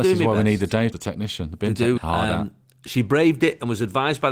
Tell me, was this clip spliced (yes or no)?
yes